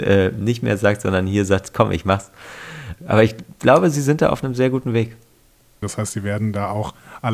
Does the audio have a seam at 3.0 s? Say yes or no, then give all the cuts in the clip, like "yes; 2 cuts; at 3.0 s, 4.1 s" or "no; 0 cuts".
yes; 2 cuts; at 3.0 s, 5.8 s